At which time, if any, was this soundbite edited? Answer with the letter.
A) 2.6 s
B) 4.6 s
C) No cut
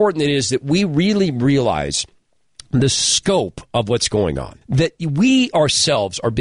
B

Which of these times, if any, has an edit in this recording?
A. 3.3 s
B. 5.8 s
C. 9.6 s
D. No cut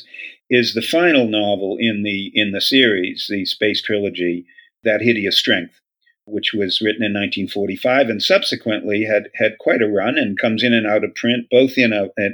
D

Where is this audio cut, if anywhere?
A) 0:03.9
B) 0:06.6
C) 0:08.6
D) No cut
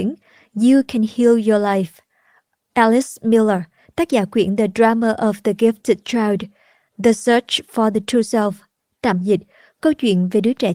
D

